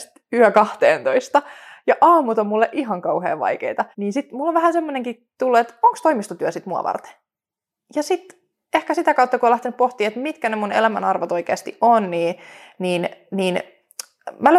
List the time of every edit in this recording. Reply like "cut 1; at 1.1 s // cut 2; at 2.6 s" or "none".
cut 1; at 3.9 s